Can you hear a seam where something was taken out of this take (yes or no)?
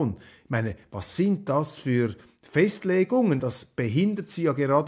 yes